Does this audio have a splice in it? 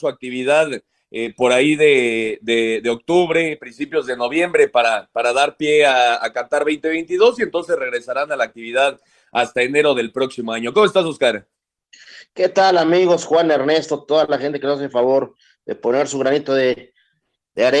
no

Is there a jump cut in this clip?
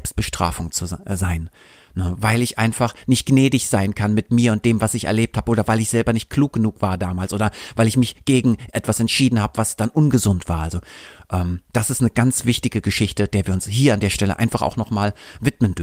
no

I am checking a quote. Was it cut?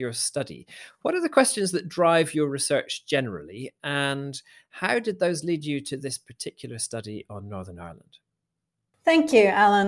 no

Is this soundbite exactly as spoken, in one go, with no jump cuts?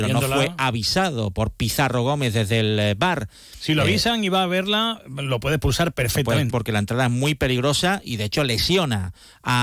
no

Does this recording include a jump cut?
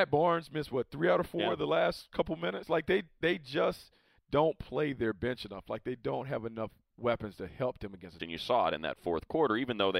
yes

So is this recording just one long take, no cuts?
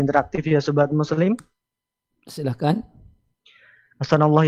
no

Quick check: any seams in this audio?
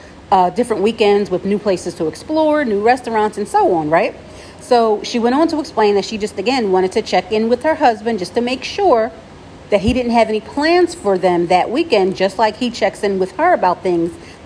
no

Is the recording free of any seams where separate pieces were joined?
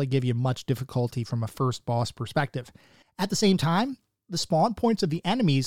no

